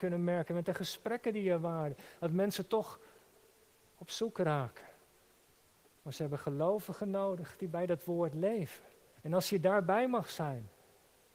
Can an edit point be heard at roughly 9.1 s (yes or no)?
yes